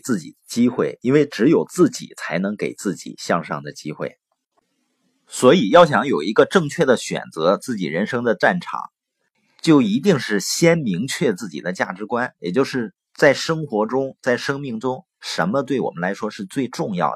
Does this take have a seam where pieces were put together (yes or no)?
no